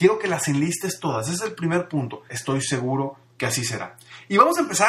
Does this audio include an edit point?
yes; 1 cut; at 2.3 s

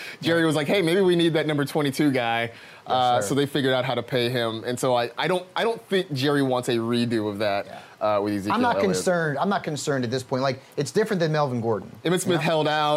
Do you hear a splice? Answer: yes; 1 cut; at 12.0 s

